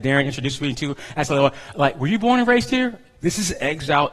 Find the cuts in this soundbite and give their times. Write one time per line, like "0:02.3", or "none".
0:01.7
0:03.2